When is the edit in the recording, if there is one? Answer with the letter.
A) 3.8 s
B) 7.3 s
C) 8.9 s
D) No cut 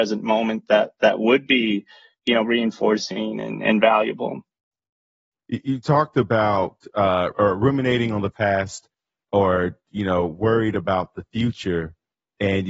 B